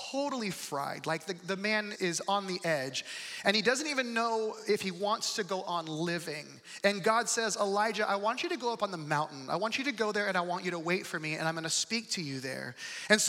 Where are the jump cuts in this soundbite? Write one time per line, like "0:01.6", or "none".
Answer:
0:01.9